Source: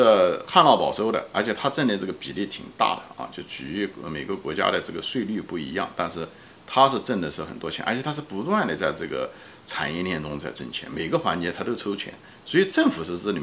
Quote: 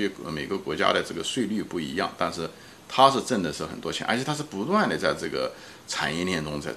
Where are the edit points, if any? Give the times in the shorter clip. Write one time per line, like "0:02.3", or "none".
none